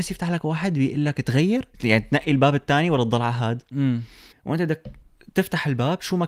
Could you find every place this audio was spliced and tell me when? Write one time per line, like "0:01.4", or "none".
0:01.7
0:04.3